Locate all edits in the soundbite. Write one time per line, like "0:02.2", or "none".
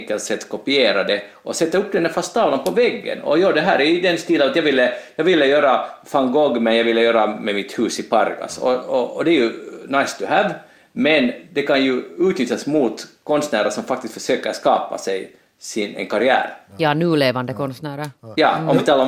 none